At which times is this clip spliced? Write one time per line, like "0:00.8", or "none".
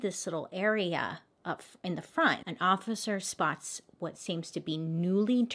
0:02.4